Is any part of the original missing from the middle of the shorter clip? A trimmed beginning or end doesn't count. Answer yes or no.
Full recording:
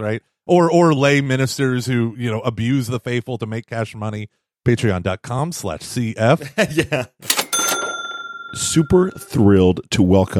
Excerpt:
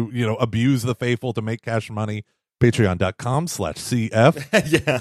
no